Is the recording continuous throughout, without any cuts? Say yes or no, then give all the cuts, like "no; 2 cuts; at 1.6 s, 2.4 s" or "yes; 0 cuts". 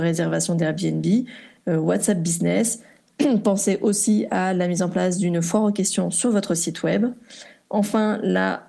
yes; 0 cuts